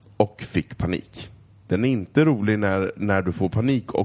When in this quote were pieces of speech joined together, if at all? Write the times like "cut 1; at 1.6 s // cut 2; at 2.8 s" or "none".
cut 1; at 1.6 s